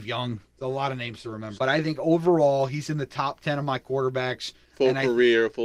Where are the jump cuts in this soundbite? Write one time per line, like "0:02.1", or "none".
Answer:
0:01.5